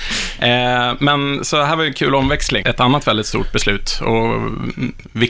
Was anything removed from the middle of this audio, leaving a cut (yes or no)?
yes